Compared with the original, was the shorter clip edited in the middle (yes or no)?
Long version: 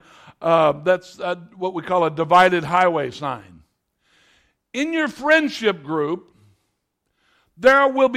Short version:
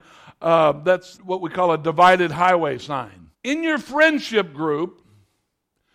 yes